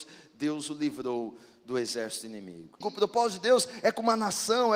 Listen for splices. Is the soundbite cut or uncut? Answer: cut